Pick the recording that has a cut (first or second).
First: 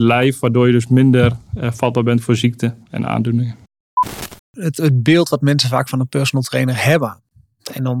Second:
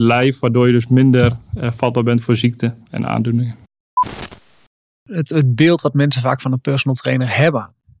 first